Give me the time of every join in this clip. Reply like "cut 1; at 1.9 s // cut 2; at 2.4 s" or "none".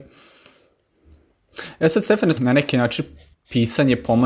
cut 1; at 2.4 s